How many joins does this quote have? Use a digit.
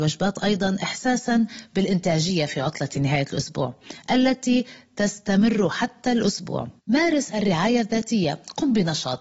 1